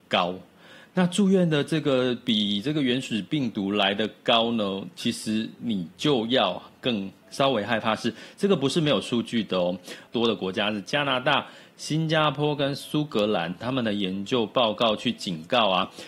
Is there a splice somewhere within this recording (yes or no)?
yes